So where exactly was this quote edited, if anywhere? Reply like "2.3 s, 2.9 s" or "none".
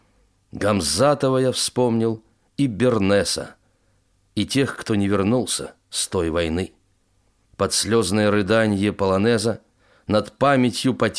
7.5 s